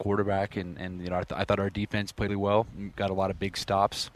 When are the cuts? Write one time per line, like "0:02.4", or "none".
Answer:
0:02.3